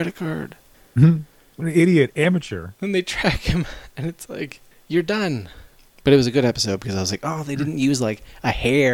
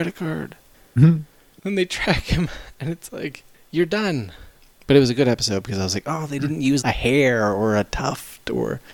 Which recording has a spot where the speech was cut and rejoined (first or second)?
second